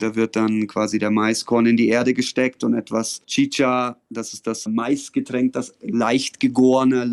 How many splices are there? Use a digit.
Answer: 1